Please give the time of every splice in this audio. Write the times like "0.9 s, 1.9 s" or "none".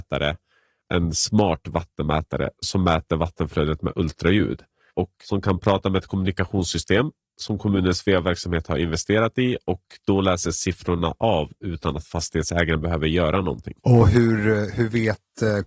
13.8 s

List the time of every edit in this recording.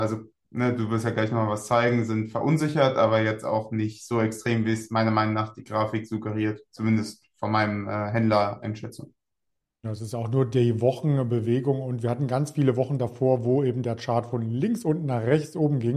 none

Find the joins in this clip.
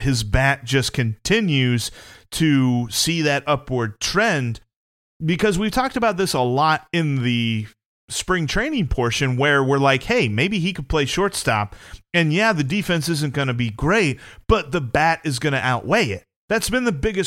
none

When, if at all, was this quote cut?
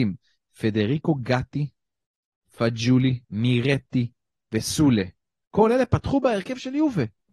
3.2 s

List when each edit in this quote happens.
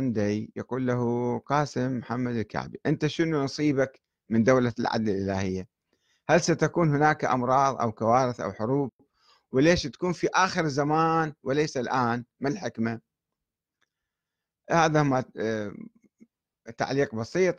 none

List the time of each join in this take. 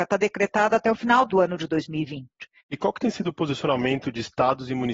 1.3 s, 2.6 s

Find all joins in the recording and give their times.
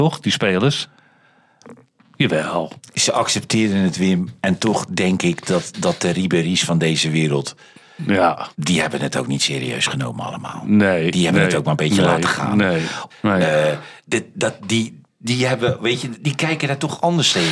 13.1 s, 15.1 s

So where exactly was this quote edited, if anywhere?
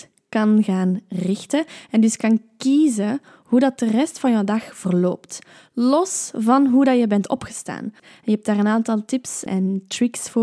8.0 s, 9.5 s

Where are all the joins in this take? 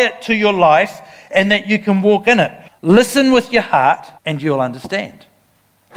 2.7 s, 4.2 s

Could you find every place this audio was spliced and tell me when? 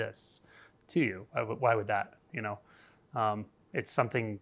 2.3 s

